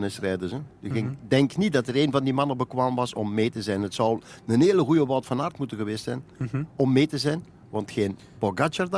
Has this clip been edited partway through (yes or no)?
no